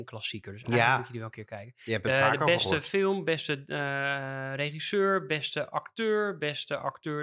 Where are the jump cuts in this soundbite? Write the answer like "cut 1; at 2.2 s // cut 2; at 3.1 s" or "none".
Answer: none